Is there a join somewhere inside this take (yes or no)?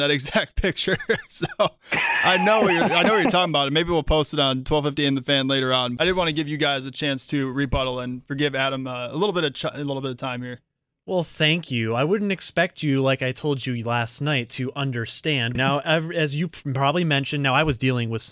yes